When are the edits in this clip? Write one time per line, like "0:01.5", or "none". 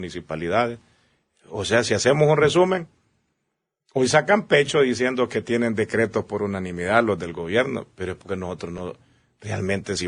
none